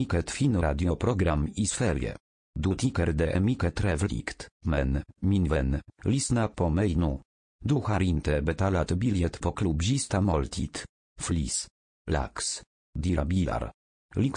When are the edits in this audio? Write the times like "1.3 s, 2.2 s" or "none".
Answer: 4.6 s, 11.0 s, 12.8 s

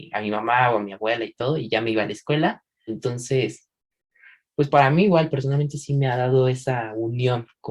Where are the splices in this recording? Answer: 2.9 s

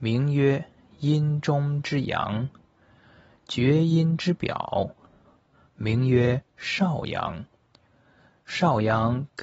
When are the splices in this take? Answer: none

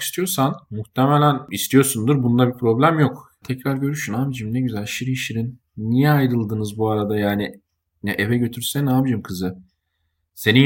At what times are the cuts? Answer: 3.4 s

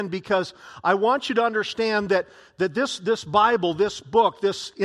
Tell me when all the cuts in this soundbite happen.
none

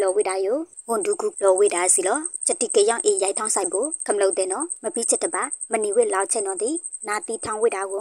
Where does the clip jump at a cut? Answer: 1.3 s

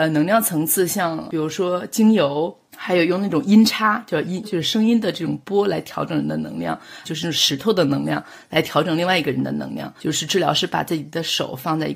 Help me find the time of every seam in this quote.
4.4 s, 7.0 s, 10.0 s

